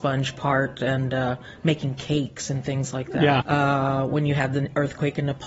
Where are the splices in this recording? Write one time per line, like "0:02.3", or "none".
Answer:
0:03.4